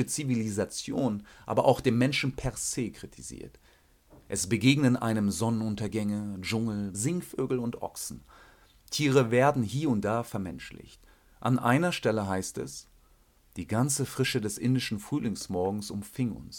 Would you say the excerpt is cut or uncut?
cut